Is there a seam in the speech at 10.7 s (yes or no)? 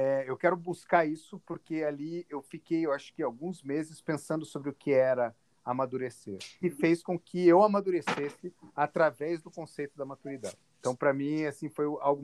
no